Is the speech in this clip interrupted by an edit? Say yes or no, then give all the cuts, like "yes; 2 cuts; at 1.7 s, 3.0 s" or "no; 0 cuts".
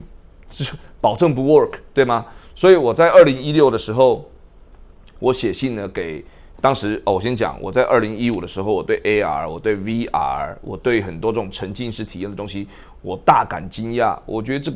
no; 0 cuts